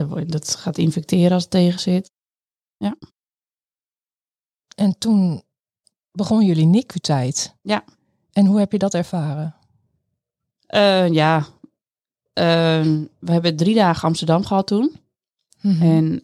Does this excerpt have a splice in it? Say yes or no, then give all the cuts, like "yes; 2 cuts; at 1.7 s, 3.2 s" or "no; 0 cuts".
no; 0 cuts